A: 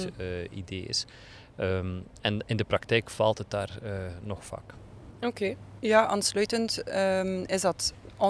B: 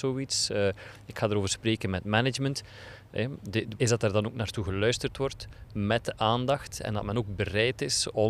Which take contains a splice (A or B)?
B